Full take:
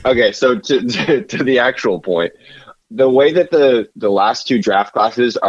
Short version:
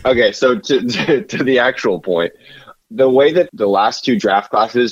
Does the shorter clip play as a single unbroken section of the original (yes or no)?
no